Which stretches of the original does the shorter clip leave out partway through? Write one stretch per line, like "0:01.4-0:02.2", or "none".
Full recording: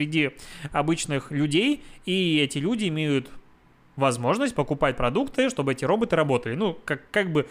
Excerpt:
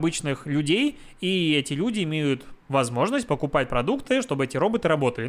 0:03.4-0:03.9